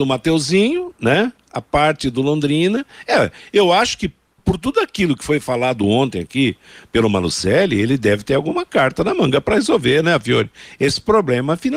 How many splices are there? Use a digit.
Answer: 1